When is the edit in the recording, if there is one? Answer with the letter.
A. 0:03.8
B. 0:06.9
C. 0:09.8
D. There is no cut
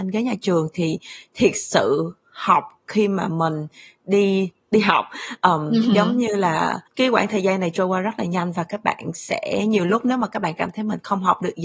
B